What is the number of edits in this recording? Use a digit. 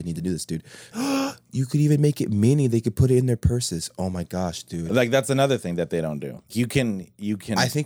2